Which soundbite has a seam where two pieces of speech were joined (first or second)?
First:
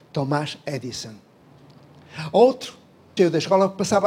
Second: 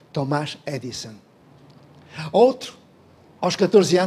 first